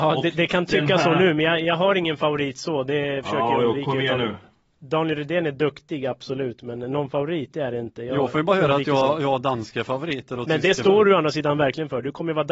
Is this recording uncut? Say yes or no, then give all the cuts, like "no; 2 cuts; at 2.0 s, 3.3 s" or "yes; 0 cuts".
yes; 0 cuts